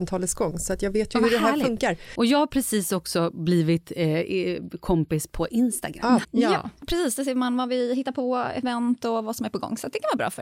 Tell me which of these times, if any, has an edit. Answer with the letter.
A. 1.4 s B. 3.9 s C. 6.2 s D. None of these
C